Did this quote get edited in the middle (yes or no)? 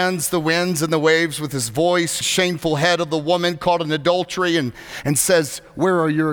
yes